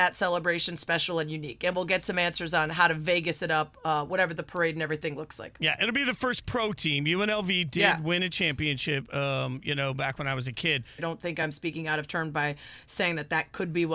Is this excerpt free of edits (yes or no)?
no